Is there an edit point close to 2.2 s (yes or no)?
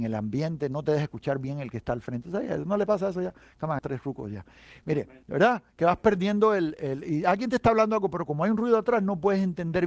no